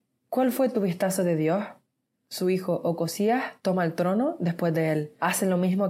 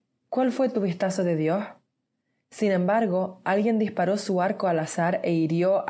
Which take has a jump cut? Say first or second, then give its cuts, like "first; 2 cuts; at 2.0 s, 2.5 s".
first; 1 cut; at 2.2 s